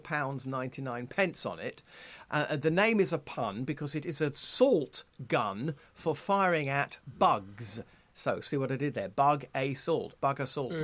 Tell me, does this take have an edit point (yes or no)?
yes